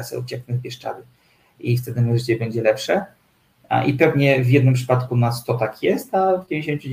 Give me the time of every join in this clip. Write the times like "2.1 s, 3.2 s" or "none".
none